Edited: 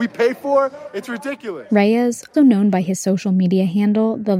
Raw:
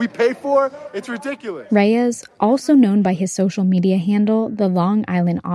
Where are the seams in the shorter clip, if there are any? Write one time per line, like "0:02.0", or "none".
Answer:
0:02.3